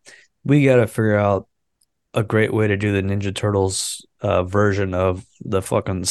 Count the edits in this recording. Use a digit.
0